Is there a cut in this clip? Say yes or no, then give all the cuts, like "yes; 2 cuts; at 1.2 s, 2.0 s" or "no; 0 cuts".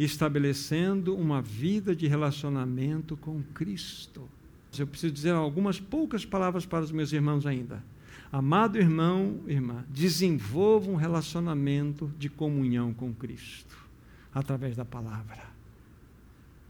yes; 1 cut; at 4.7 s